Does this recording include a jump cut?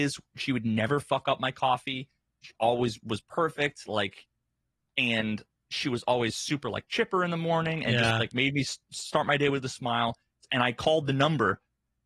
no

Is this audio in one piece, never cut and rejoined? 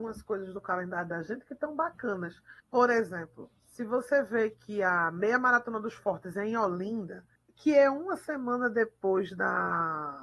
no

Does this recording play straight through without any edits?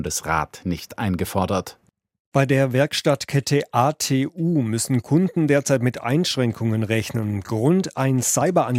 yes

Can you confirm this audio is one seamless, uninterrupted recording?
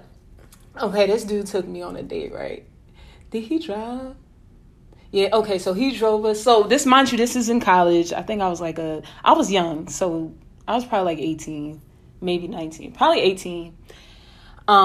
yes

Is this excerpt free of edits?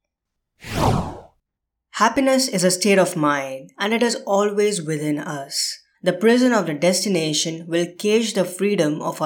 no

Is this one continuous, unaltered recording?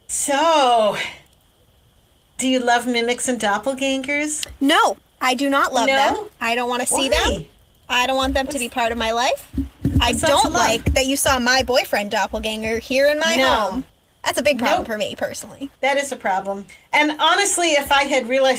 yes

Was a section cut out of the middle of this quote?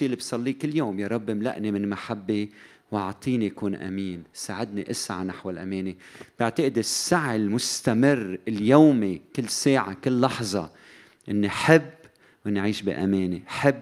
no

